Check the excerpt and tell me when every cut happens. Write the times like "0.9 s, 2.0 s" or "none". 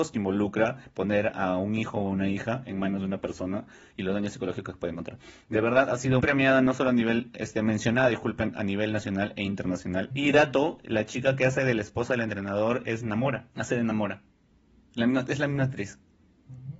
6.2 s, 10.1 s, 13.5 s